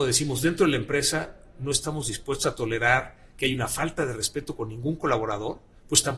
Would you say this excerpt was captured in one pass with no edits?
yes; 0 cuts

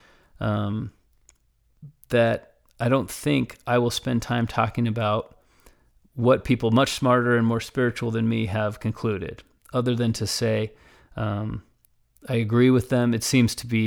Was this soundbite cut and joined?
no; 0 cuts

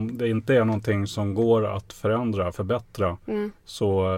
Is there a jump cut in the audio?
no; 0 cuts

